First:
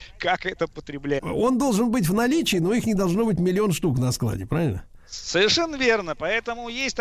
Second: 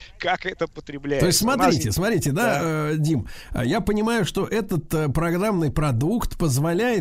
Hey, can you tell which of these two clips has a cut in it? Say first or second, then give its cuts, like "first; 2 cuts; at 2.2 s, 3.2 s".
first; 1 cut; at 1.2 s